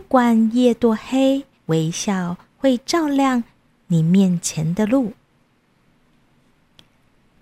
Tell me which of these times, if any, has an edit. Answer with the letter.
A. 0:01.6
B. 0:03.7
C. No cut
A